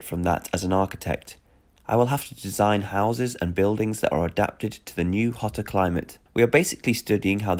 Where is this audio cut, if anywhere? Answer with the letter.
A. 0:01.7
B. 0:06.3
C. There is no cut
B